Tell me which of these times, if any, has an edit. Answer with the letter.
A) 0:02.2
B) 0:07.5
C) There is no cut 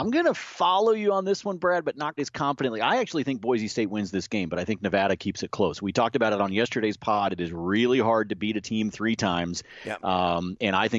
A